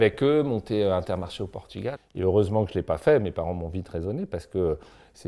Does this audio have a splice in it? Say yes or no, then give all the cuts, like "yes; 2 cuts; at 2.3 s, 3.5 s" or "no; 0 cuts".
yes; 1 cut; at 2.0 s